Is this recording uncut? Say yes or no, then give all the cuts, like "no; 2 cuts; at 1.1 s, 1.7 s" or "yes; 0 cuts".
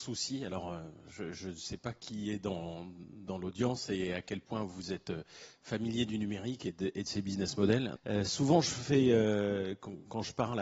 no; 1 cut; at 8.0 s